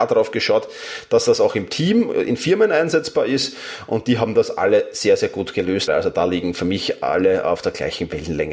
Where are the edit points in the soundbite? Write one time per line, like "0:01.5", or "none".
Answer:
0:05.9